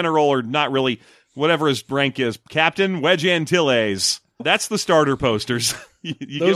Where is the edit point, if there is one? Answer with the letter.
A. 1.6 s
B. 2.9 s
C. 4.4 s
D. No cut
C